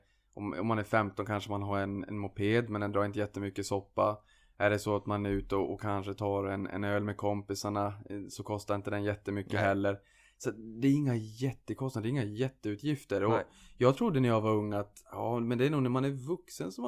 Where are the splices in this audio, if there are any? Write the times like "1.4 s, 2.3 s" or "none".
none